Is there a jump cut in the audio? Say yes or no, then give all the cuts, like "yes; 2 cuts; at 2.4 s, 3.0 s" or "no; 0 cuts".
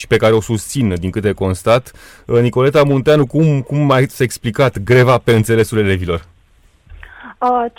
no; 0 cuts